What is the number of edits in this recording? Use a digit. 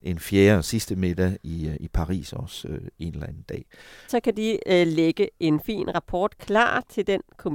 1